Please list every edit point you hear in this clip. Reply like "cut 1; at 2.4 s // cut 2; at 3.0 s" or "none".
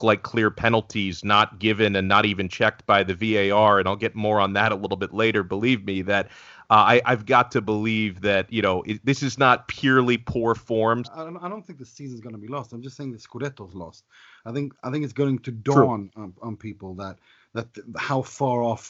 cut 1; at 11.0 s